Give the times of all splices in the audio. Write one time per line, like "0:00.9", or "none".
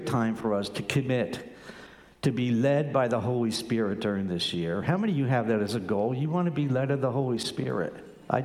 none

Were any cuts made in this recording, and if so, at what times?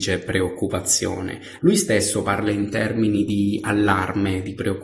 0:01.6

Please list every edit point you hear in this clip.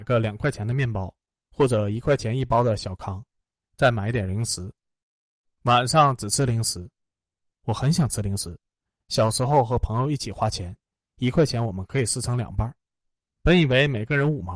none

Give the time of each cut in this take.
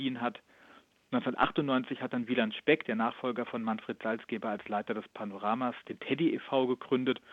none

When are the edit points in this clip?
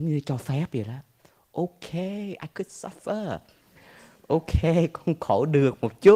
none

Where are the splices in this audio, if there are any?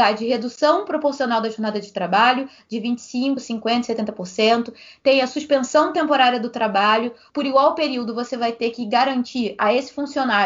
none

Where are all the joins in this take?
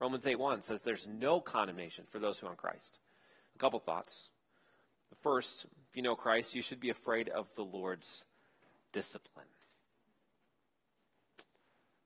0:03.5

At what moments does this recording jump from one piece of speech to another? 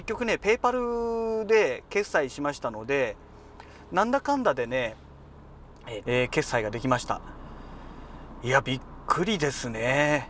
0:06.0

